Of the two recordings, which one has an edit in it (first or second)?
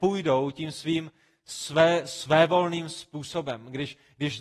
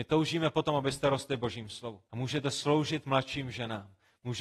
second